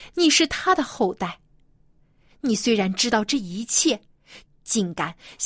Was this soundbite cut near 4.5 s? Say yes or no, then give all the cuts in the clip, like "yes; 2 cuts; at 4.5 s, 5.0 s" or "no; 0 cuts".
yes; 1 cut; at 4.5 s